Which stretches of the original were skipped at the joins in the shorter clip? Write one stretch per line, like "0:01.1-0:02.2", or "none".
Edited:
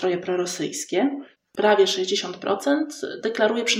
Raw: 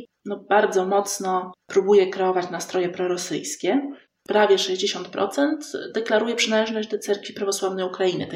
none